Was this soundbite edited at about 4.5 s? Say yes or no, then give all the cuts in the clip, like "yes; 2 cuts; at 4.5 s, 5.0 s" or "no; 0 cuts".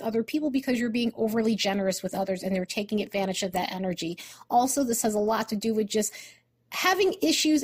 no; 0 cuts